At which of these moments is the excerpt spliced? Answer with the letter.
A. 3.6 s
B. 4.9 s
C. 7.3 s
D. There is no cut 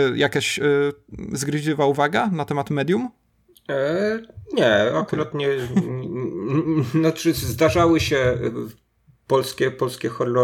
B